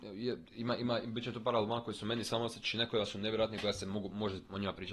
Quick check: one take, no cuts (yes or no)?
yes